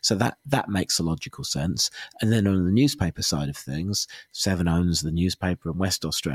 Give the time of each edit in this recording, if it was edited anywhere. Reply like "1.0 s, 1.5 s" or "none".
none